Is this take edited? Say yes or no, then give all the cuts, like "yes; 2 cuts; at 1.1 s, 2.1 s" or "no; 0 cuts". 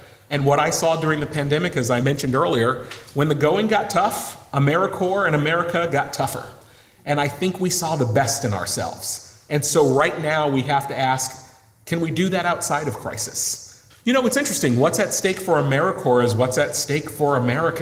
yes; 1 cut; at 13.9 s